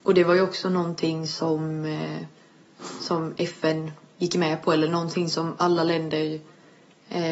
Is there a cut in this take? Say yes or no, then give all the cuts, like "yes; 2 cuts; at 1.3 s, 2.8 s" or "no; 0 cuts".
no; 0 cuts